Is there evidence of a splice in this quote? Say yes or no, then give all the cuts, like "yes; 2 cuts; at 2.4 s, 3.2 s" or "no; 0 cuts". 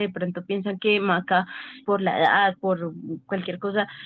yes; 1 cut; at 1.8 s